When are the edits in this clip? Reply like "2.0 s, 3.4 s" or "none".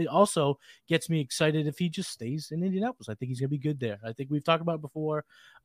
none